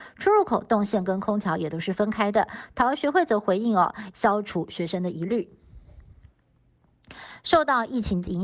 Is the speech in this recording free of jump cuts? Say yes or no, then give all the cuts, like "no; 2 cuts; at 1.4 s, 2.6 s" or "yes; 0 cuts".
no; 1 cut; at 4.1 s